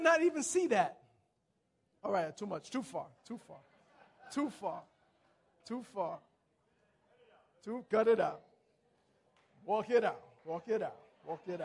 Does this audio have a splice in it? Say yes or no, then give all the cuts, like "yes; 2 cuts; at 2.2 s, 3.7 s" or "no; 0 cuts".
no; 0 cuts